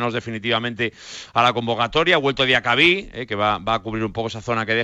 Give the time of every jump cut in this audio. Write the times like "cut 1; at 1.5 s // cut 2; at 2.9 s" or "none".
none